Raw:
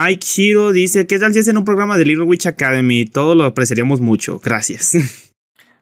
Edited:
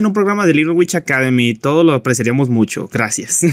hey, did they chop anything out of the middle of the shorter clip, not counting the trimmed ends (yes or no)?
no